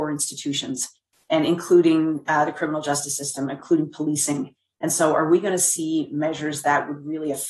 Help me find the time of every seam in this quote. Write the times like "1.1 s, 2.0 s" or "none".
none